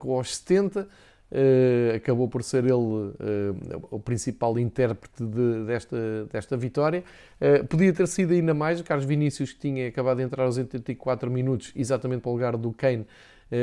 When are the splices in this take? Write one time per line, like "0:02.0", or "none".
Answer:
none